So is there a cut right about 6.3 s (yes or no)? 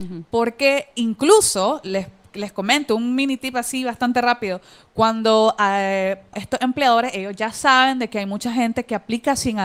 yes